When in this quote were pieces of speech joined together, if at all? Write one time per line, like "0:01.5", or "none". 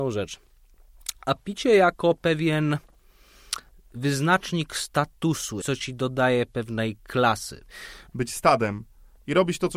0:05.6
0:08.1